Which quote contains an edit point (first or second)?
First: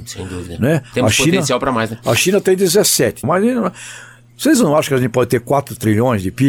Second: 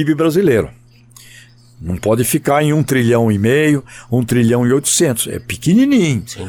first